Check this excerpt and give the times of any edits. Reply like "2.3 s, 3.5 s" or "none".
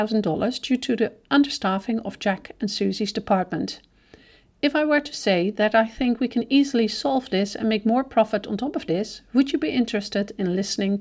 none